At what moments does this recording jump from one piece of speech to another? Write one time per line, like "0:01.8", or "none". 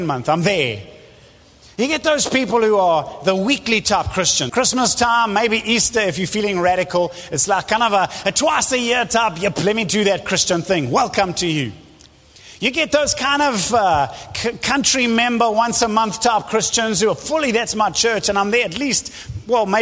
0:04.5